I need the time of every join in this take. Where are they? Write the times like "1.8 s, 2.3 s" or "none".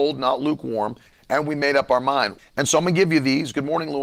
1.1 s, 2.4 s